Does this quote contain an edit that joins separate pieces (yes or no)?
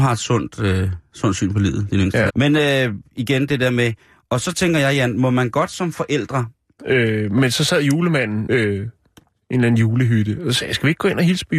yes